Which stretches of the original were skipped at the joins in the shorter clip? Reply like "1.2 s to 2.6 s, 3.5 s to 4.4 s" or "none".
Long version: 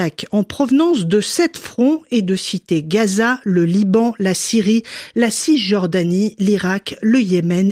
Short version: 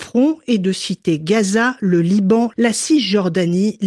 4.2 s to 5.1 s